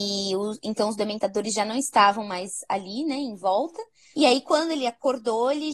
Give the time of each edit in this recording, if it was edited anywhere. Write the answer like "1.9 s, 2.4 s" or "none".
4.1 s